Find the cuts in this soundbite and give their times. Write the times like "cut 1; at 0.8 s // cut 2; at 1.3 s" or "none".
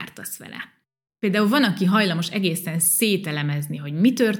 none